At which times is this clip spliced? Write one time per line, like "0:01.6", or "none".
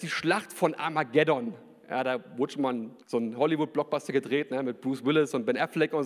0:03.0